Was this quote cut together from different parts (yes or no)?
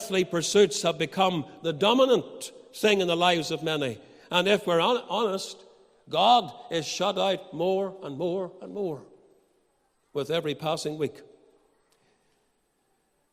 no